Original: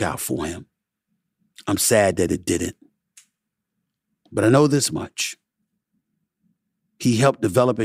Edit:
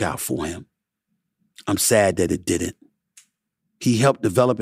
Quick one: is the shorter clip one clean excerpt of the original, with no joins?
no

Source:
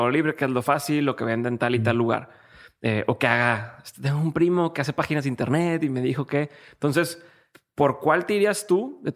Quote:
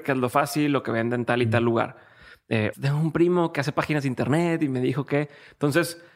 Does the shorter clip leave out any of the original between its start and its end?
yes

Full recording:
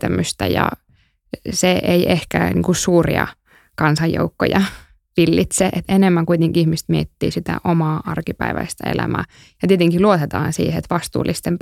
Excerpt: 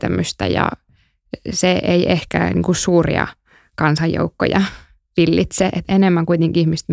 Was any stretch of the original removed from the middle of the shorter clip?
no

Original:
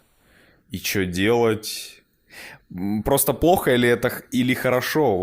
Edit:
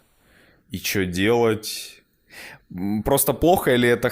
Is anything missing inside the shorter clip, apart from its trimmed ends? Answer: no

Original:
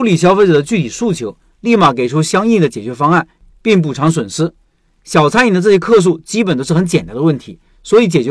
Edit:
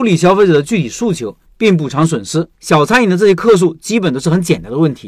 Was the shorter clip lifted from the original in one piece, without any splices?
no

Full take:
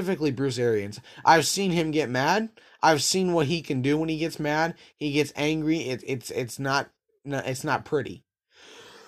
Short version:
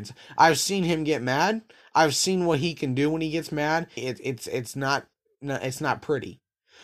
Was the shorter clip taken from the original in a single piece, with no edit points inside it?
no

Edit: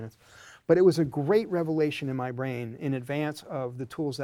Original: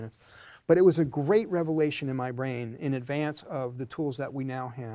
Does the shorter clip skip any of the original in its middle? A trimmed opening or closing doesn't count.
no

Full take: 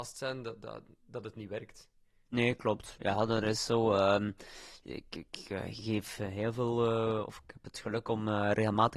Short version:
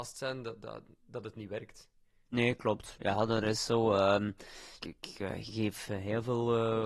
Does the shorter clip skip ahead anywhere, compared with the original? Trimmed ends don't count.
yes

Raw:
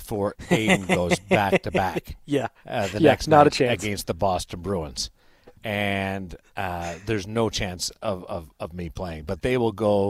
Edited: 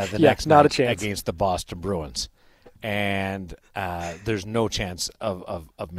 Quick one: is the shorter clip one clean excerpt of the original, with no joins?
yes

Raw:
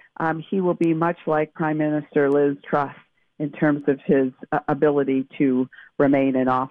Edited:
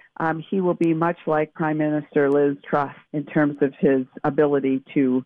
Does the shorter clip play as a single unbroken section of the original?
no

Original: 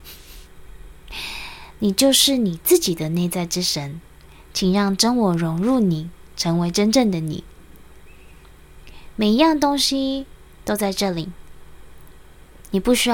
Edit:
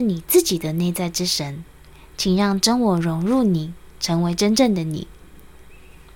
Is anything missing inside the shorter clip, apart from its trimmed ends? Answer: no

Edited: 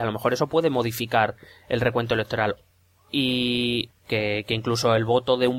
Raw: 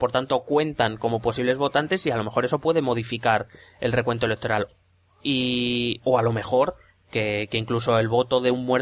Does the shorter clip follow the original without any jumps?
no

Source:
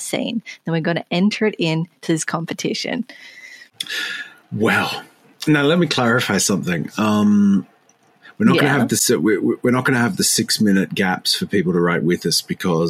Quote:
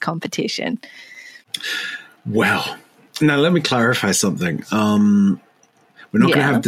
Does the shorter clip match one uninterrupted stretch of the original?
yes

